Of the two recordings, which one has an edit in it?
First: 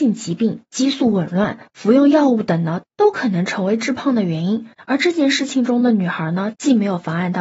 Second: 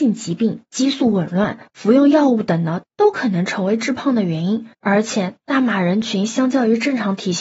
first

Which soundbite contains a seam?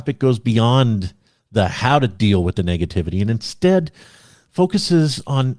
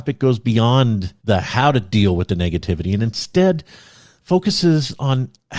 second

